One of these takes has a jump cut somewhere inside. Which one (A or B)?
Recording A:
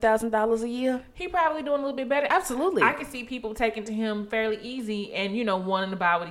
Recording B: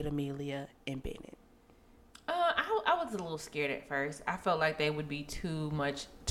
A